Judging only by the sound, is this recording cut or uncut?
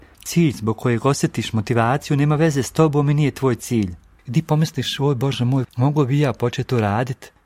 cut